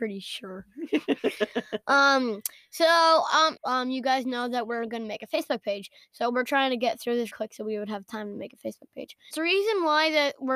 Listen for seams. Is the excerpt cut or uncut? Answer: cut